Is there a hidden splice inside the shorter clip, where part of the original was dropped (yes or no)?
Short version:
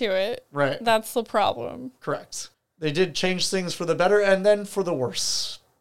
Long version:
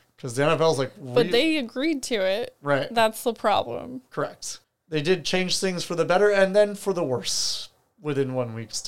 no